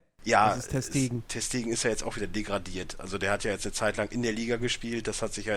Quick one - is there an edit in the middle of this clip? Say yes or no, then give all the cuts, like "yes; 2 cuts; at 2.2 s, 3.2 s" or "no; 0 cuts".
no; 0 cuts